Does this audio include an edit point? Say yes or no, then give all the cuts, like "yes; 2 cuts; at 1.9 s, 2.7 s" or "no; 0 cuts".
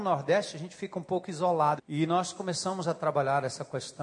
yes; 1 cut; at 1.8 s